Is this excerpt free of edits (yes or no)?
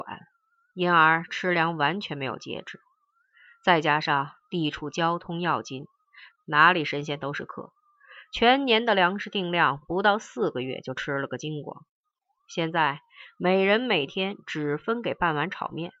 no